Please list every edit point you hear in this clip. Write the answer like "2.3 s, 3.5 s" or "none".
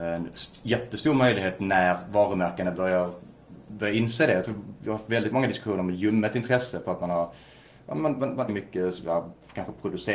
8.5 s